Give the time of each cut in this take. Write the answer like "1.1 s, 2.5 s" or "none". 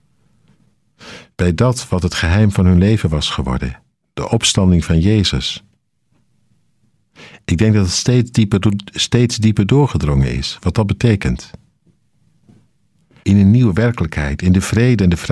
13.2 s